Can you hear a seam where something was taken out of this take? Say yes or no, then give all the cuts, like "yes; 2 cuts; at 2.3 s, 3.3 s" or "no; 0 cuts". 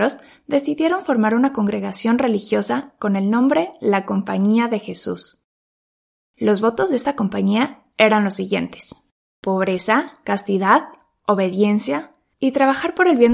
no; 0 cuts